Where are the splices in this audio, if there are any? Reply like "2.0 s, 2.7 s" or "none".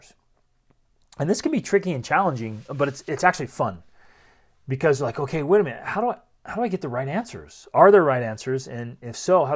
none